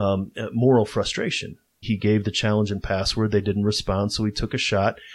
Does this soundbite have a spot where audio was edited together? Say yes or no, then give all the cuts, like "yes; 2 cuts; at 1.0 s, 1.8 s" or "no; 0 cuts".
yes; 1 cut; at 1.8 s